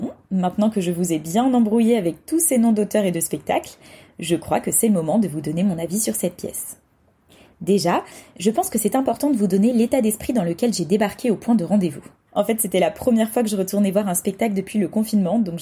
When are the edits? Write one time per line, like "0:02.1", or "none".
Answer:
0:12.3